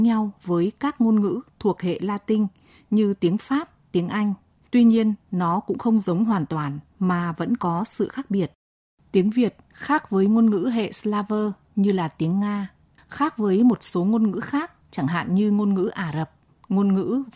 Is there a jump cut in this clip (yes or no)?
no